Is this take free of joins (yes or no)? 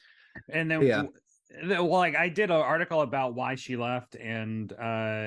yes